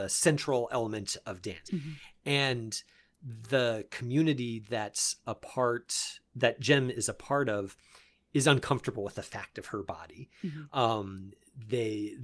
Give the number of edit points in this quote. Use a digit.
1